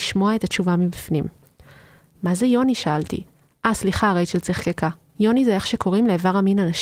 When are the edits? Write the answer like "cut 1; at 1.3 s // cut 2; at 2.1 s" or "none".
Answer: none